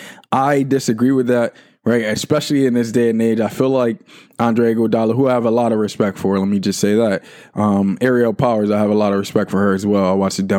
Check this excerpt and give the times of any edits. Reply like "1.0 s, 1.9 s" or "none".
none